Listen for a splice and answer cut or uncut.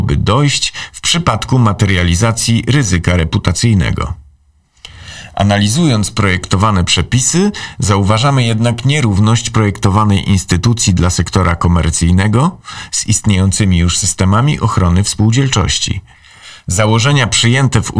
uncut